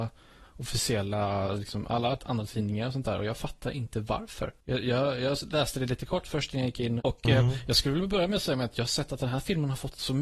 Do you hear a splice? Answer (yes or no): yes